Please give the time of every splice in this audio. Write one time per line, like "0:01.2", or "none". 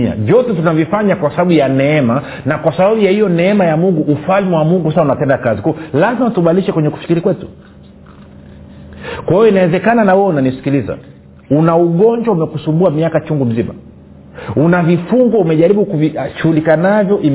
none